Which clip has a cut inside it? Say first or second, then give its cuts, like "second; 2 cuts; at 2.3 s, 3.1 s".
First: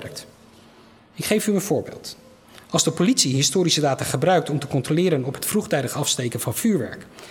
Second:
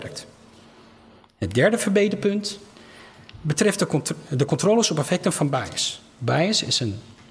first; 1 cut; at 1.0 s